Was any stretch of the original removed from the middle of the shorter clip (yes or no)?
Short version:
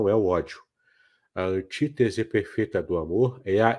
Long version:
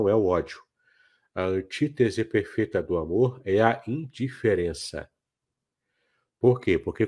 no